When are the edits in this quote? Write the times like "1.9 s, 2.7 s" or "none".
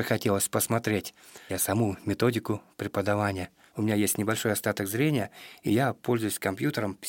1.5 s, 3.7 s